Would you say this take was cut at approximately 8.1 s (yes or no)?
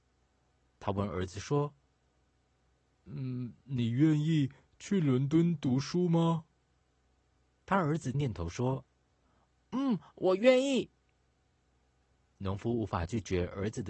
yes